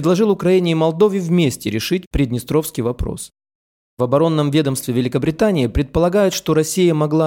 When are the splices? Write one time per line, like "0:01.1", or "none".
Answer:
none